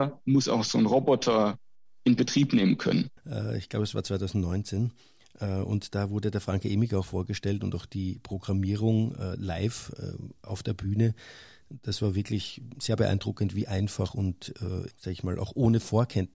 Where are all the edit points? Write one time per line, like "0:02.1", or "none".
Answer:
0:03.2
0:14.9

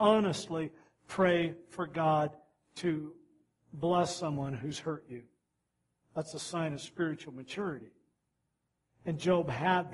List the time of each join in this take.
none

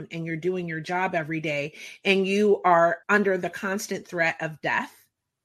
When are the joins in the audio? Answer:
0:03.0

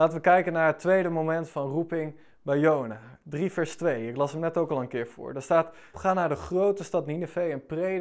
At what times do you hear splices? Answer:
0:05.9

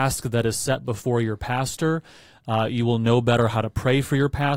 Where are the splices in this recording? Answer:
none

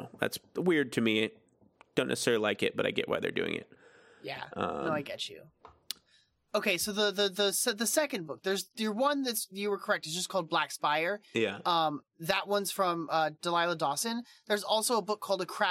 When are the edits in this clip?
none

